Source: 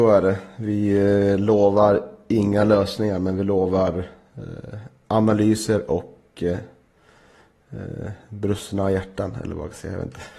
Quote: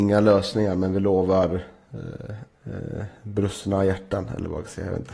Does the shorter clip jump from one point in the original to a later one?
yes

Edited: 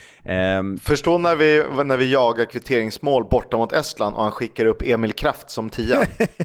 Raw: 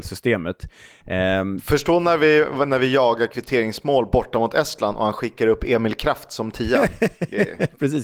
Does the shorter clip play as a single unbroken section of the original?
yes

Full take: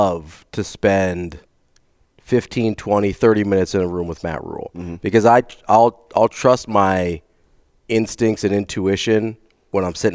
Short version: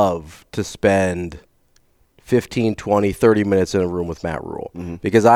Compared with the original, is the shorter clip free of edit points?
yes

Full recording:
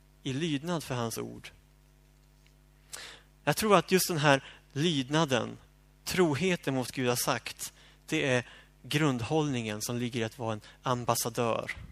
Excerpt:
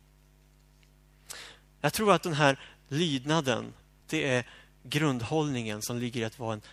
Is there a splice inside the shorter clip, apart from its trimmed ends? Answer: yes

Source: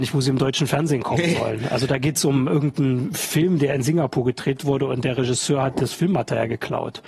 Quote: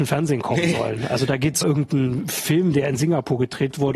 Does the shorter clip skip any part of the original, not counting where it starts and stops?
yes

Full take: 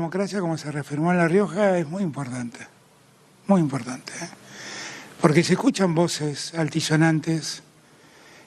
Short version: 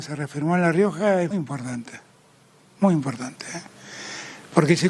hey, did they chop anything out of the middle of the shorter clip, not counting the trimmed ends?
yes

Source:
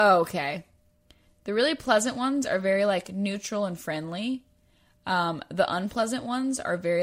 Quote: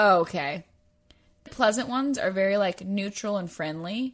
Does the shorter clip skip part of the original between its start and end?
yes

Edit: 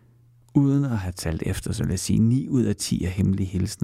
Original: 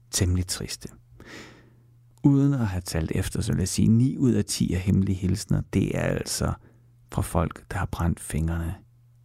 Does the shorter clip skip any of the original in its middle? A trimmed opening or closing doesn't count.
no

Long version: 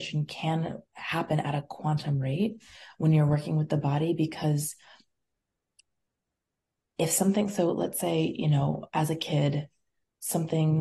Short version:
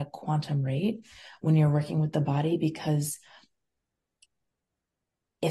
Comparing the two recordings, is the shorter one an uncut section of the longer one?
yes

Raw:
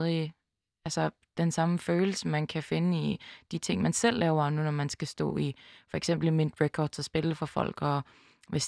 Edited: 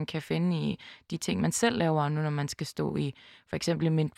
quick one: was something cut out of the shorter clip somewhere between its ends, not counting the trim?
no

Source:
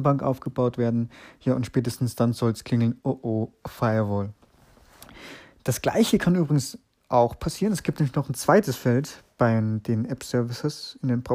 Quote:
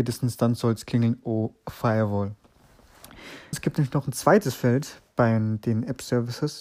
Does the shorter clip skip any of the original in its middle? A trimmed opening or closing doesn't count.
yes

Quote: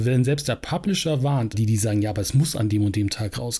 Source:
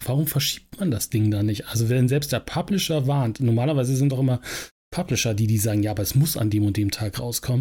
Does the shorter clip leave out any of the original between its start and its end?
yes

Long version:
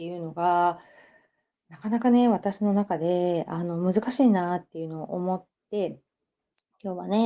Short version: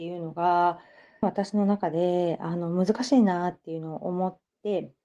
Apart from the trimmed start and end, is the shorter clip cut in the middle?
yes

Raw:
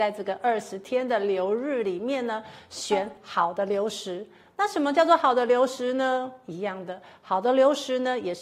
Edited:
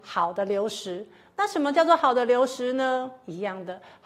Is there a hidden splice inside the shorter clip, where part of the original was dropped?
no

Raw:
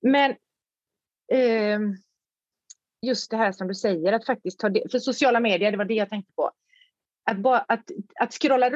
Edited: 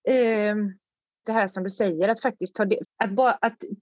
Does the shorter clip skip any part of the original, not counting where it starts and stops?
yes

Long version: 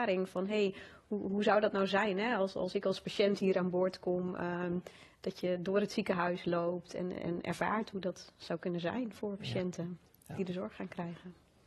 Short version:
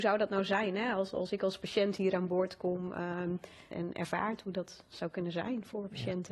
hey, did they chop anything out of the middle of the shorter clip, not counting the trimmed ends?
yes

